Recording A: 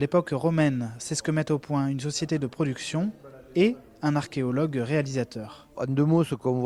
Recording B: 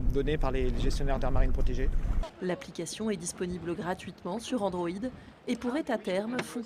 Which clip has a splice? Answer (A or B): B